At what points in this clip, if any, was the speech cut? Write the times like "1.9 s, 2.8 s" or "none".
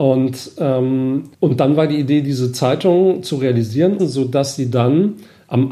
1.3 s, 4.0 s